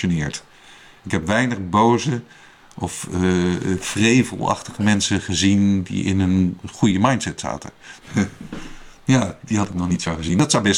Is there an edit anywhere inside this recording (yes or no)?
yes